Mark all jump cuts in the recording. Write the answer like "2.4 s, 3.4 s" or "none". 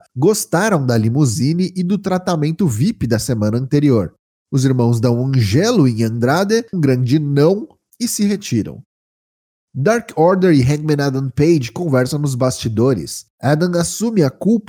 6.7 s